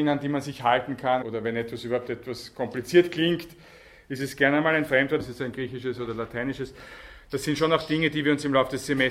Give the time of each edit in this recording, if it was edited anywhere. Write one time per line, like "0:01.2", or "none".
0:01.2
0:05.2